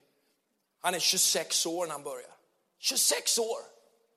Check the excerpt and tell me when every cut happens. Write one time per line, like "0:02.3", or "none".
none

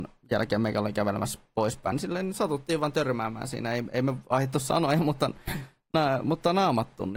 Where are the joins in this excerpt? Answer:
0:01.9

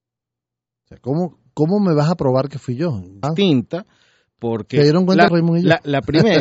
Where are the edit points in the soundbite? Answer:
0:03.2
0:05.3

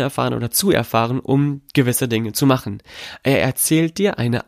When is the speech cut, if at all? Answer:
0:01.7

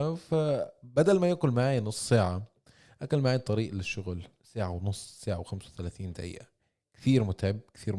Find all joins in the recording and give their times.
none

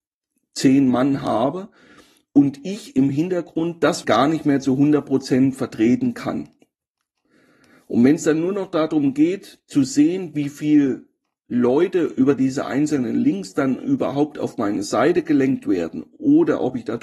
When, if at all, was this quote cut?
0:04.0

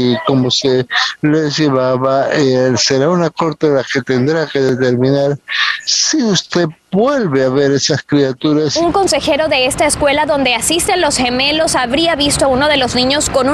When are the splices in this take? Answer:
none

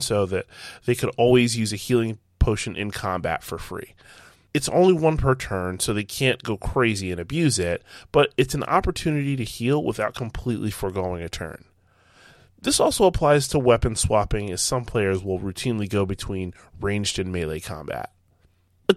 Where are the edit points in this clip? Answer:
none

